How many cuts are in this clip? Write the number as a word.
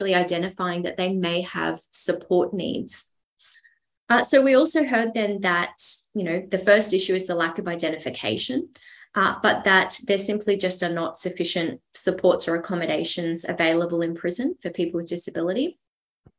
zero